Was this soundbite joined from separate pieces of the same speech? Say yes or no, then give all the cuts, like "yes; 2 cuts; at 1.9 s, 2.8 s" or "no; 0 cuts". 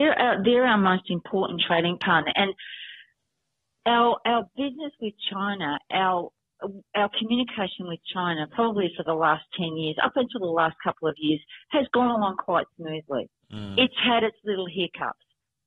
no; 0 cuts